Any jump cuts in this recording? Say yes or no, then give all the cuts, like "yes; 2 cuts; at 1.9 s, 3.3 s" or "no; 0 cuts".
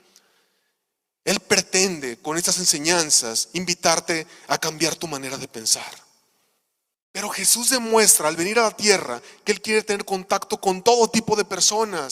yes; 1 cut; at 6.9 s